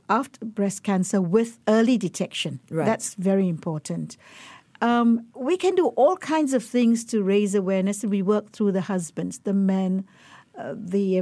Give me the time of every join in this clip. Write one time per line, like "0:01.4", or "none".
0:05.3